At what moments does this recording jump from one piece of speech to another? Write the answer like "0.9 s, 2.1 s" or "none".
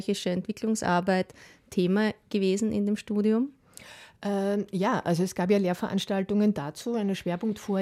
none